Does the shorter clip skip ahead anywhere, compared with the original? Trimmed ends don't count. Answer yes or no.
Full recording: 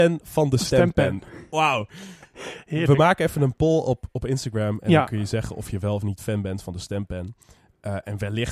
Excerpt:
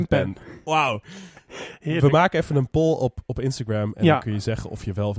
no